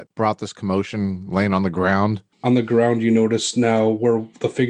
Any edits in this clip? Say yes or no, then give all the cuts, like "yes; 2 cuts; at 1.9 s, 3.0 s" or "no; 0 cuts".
yes; 1 cut; at 2.3 s